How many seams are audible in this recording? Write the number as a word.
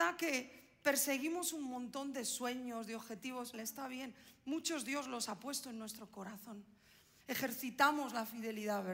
two